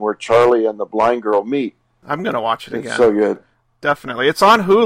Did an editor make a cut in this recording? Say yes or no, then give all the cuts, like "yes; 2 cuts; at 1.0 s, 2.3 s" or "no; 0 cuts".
yes; 1 cut; at 2.0 s